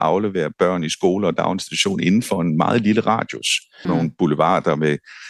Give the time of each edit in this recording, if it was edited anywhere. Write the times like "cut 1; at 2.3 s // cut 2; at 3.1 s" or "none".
cut 1; at 3.8 s